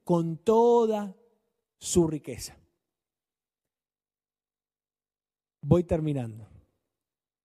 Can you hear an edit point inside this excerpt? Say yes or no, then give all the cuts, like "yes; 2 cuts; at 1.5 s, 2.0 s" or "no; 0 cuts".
no; 0 cuts